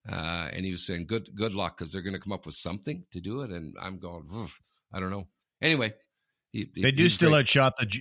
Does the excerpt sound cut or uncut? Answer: uncut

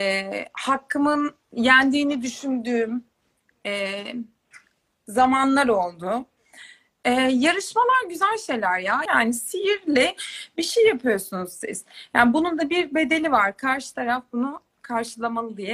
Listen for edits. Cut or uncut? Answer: cut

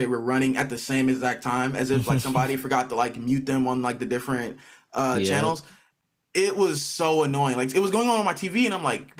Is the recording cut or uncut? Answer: uncut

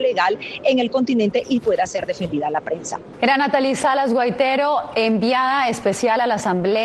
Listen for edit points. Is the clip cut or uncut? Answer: cut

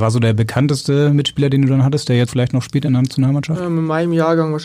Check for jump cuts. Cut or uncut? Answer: cut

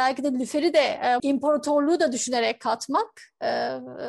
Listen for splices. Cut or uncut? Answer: cut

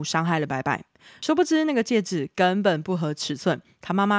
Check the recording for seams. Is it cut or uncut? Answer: uncut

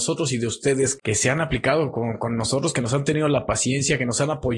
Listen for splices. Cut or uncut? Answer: cut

